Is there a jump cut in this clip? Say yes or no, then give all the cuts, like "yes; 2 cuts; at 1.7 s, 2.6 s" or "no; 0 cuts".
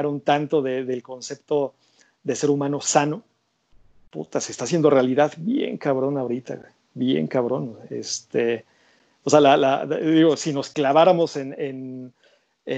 no; 0 cuts